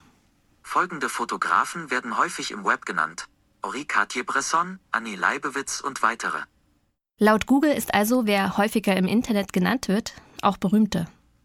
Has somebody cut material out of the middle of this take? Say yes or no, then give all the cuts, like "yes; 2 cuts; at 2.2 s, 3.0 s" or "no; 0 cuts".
yes; 1 cut; at 4.8 s